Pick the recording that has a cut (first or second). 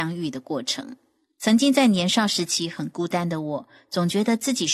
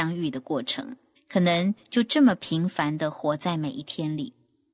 second